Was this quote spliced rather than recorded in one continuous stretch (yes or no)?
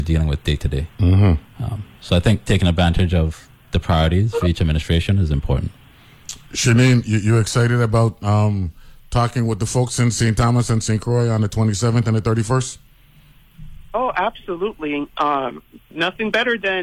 no